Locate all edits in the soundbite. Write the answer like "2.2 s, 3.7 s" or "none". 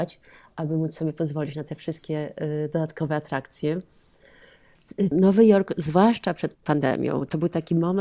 5.1 s